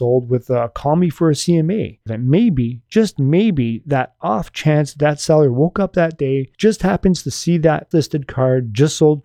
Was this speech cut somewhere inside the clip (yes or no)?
yes